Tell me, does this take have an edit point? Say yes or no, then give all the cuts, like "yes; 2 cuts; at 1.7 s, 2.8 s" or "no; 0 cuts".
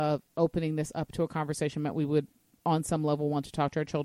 no; 0 cuts